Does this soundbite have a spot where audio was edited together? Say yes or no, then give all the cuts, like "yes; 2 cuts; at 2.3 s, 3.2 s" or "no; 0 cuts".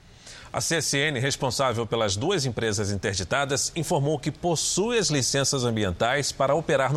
no; 0 cuts